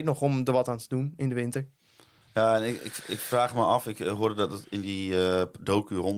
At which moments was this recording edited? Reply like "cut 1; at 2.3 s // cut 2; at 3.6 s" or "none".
none